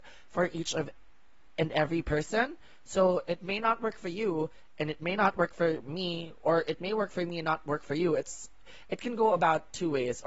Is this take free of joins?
yes; 0 cuts

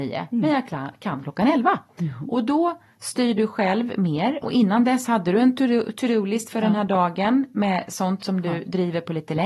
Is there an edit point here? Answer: yes; 1 cut; at 4.4 s

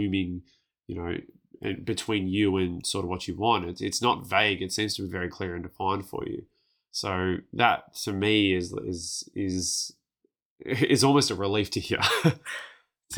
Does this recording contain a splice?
no; 0 cuts

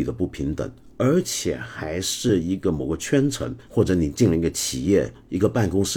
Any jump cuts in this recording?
no; 0 cuts

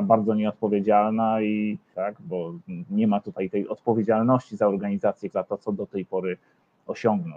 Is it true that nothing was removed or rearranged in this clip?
no; 2 cuts; at 1.9 s, 5.3 s

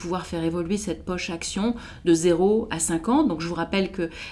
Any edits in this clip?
no; 0 cuts

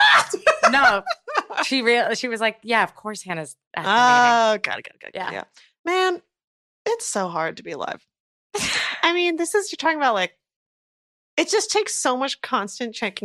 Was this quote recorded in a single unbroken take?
yes; 0 cuts

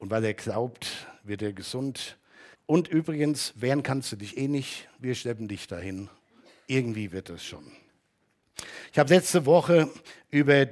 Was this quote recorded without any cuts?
no; 1 cut; at 2.5 s

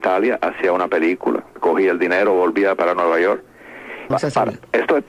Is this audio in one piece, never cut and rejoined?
no; 1 cut; at 4.1 s

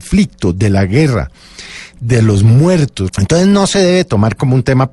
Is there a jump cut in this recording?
yes; 1 cut; at 3.1 s

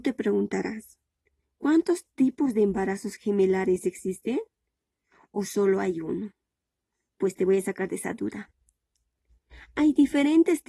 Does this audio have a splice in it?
no; 0 cuts

